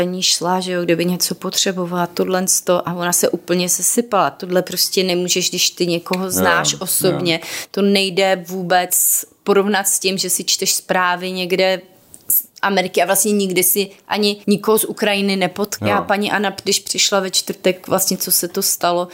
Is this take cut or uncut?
cut